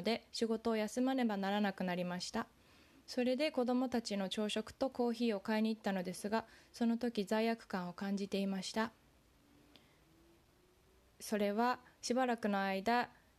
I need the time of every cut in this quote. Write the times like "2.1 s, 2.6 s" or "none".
none